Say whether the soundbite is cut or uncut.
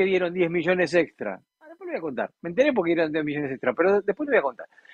cut